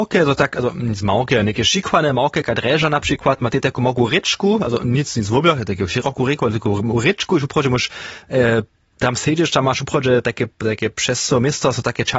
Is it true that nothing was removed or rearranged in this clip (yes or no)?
yes